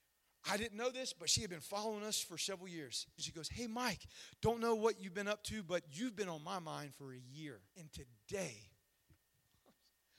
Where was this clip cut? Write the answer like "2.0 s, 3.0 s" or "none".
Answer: 3.2 s, 7.7 s